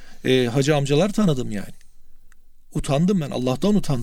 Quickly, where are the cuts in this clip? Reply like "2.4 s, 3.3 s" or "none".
none